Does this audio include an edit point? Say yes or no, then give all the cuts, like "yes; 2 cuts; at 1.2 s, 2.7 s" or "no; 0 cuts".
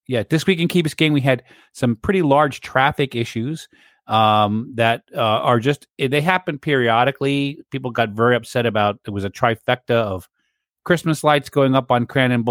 no; 0 cuts